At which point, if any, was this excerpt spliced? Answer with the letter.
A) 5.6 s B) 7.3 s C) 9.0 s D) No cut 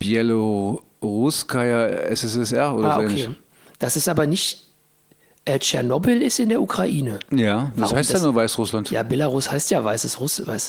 B